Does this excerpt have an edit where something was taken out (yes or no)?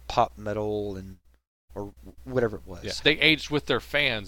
yes